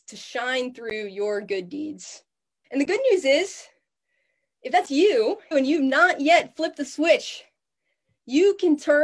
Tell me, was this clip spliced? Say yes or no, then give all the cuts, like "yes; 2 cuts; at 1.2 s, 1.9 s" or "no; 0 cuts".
yes; 2 cuts; at 2.6 s, 5.5 s